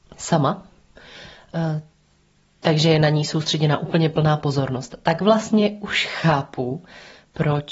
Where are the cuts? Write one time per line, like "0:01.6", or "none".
none